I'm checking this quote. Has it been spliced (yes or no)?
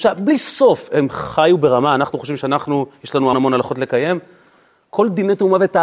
yes